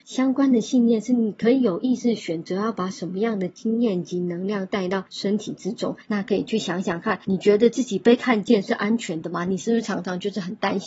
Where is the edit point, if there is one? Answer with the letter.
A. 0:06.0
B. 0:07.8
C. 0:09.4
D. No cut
A